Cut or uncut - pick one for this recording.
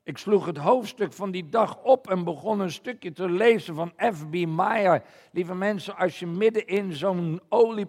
uncut